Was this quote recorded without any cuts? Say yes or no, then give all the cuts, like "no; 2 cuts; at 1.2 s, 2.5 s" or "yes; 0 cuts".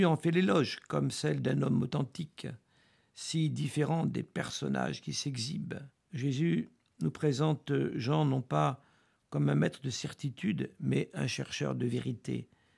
no; 1 cut; at 6.0 s